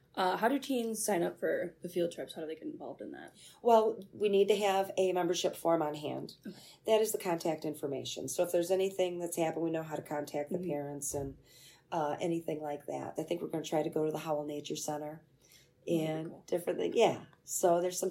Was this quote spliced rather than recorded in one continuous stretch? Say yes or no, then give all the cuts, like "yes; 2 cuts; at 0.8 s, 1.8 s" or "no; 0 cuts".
yes; 1 cut; at 13.2 s